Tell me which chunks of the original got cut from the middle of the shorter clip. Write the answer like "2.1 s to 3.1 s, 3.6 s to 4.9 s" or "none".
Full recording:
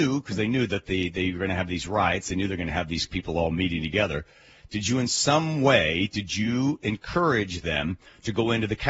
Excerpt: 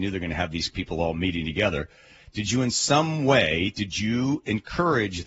none